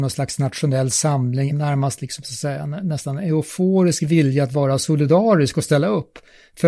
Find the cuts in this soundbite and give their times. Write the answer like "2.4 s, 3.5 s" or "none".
1.5 s